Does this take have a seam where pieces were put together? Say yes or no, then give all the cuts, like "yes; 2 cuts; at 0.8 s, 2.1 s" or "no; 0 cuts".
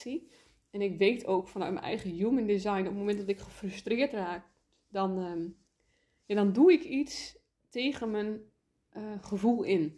no; 0 cuts